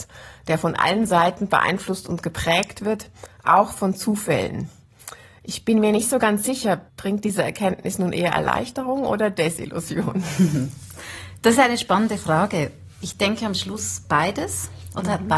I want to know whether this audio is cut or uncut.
cut